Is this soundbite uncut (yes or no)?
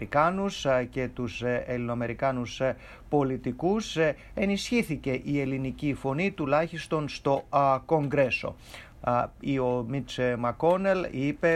no